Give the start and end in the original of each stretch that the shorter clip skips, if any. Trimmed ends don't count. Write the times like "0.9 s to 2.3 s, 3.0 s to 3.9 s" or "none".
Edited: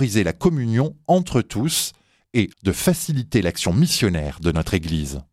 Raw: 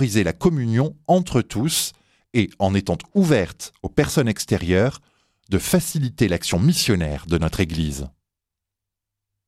2.5 s to 5.4 s